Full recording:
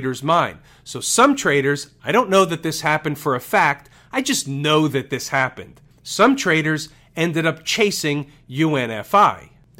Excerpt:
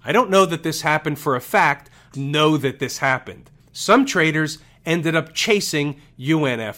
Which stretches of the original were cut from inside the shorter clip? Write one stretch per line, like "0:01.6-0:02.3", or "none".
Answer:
0:04.1-0:04.4